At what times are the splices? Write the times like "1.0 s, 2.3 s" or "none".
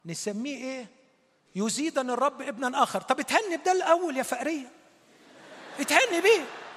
1.5 s